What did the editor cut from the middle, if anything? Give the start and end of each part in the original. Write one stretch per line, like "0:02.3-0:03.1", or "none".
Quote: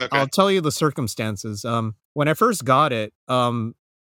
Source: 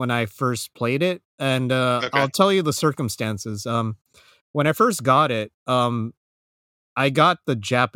0:04.0-0:04.4